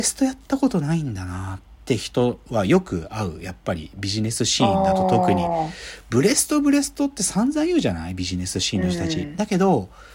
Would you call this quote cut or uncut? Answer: uncut